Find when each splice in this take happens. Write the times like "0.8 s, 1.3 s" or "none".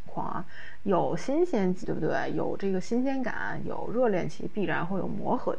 1.8 s

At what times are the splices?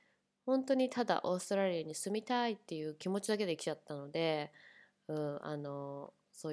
none

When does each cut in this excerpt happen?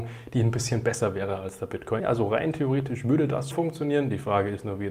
2.0 s, 3.5 s

